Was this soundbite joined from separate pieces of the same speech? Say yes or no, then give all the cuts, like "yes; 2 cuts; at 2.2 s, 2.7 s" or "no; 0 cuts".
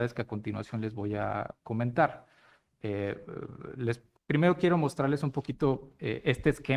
yes; 1 cut; at 4.2 s